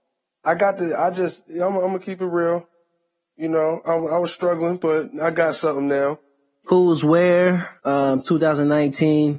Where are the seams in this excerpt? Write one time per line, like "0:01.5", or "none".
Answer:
0:06.6
0:07.8

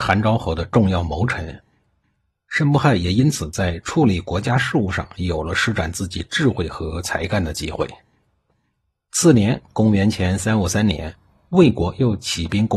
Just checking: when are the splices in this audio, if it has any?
none

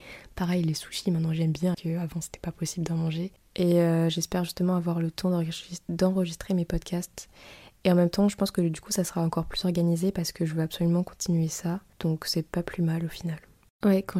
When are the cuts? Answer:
0:01.7
0:03.4
0:11.9

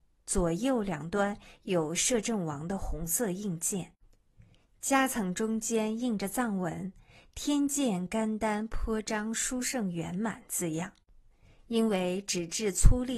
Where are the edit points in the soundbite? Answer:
none

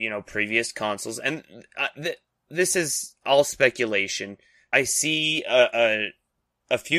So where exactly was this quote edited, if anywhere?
0:04.7

